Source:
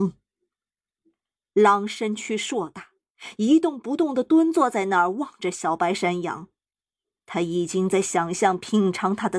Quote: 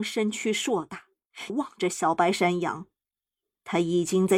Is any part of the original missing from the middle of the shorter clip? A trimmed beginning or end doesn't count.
yes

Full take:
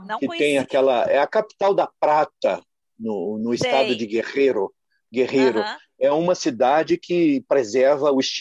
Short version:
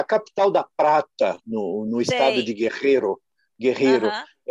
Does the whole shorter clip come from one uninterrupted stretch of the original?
no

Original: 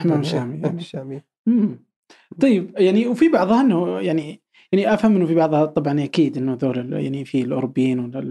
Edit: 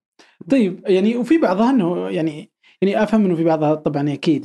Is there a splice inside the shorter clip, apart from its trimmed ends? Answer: no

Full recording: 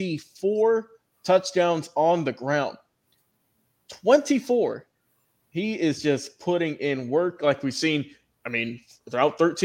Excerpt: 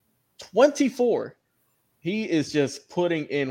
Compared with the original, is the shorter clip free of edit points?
yes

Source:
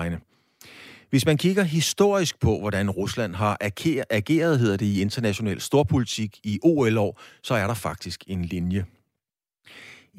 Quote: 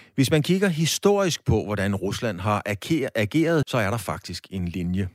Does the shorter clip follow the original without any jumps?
no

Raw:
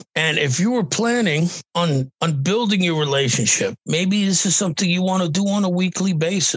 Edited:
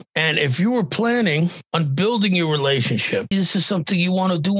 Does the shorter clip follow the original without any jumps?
no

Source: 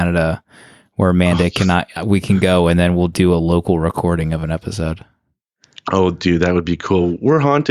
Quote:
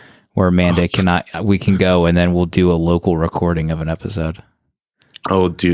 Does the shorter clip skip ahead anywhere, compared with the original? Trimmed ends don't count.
no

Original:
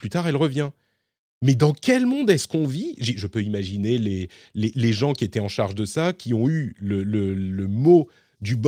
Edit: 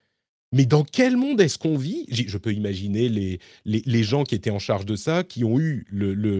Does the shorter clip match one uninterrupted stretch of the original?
yes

